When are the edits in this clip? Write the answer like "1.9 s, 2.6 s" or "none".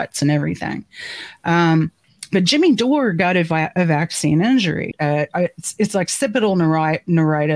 4.9 s